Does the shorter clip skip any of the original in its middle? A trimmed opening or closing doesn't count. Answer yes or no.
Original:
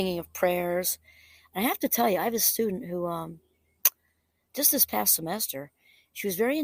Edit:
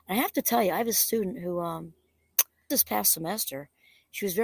yes